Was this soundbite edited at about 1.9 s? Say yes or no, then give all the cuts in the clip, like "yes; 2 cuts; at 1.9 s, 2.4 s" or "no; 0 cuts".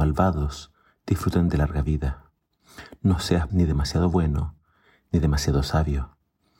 no; 1 cut; at 3.5 s